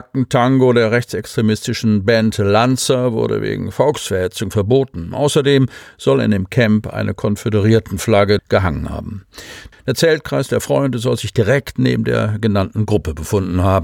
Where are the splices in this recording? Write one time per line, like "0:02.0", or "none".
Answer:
0:08.4
0:09.7